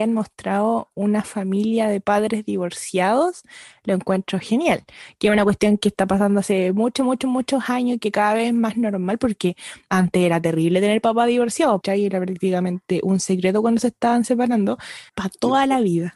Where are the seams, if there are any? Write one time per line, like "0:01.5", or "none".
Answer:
0:11.8
0:15.1

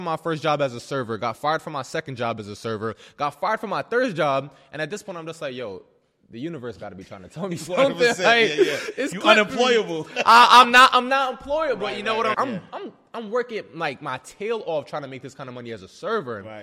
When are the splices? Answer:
0:12.3

